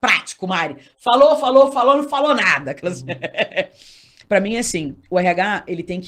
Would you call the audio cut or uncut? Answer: uncut